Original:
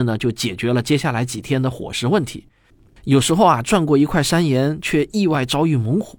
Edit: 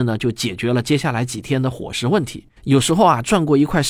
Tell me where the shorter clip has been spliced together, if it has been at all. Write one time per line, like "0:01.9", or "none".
0:02.6